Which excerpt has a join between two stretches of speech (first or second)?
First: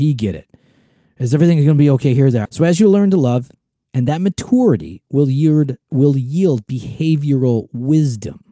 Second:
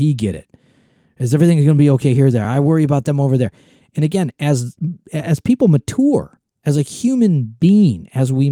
first